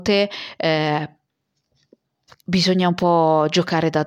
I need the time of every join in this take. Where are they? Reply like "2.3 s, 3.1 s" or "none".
none